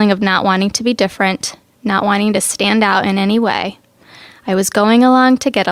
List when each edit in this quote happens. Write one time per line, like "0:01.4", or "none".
none